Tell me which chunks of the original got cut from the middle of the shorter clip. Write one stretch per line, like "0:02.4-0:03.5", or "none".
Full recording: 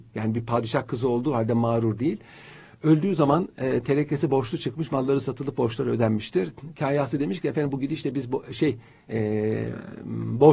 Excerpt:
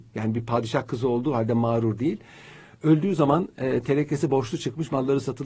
none